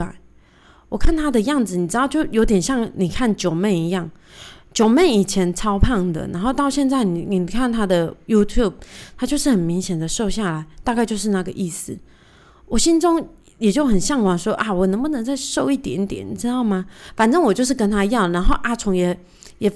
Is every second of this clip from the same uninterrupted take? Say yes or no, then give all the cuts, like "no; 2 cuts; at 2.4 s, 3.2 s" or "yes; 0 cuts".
yes; 0 cuts